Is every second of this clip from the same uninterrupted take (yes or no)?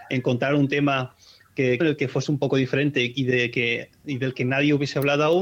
no